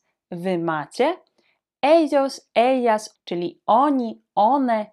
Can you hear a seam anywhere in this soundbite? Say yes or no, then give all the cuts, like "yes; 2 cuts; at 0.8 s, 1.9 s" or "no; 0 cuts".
yes; 1 cut; at 3.2 s